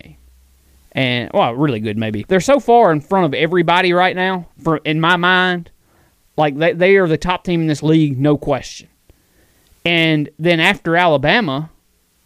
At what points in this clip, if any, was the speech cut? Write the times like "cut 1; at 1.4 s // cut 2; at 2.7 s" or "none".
cut 1; at 2.2 s